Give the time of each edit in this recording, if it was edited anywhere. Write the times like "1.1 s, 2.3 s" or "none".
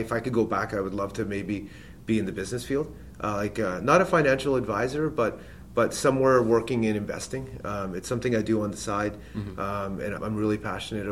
10.2 s